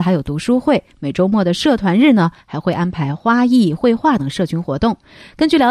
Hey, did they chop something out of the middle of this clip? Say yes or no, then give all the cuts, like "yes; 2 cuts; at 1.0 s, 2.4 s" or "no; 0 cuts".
yes; 1 cut; at 4.2 s